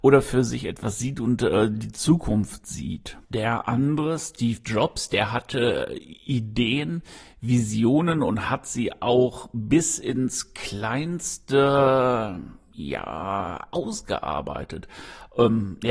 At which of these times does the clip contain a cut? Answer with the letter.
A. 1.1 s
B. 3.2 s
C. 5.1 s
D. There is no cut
B